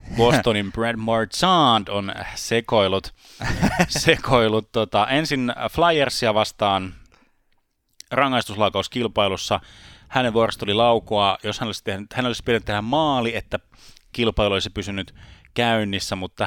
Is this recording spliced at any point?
no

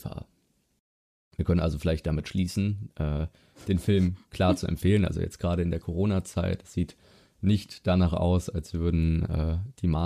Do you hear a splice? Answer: no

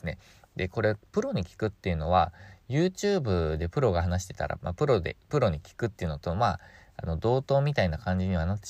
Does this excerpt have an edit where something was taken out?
no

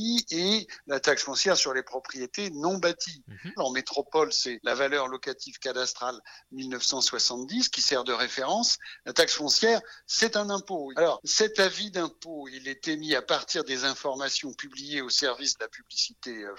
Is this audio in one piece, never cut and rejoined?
no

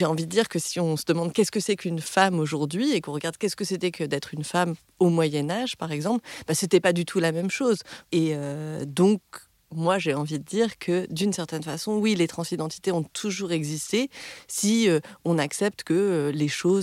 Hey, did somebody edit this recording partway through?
yes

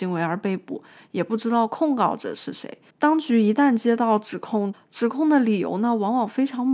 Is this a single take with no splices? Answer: no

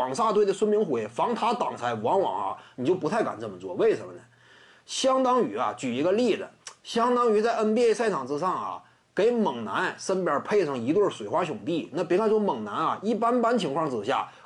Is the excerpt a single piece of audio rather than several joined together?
yes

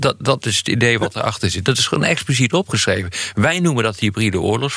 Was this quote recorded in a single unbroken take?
yes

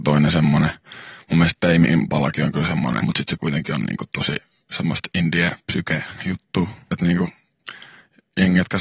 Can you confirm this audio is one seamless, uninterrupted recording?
no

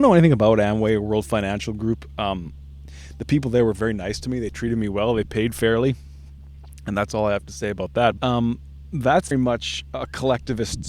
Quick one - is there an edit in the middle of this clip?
yes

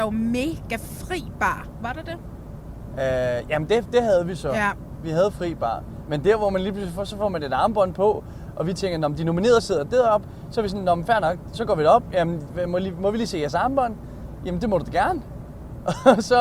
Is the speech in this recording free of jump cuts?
yes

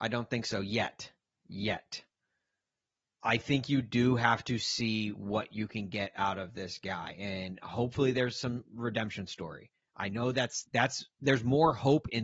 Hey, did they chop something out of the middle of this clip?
yes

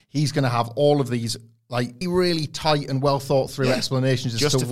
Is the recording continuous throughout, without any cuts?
no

